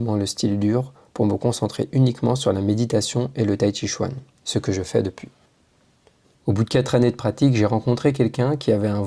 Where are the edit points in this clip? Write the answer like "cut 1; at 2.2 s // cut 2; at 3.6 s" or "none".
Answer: cut 1; at 6.3 s